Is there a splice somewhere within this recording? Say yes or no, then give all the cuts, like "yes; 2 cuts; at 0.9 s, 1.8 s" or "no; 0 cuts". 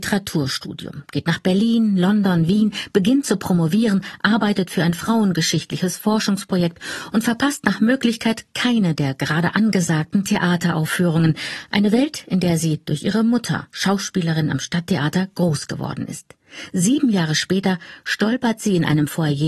no; 0 cuts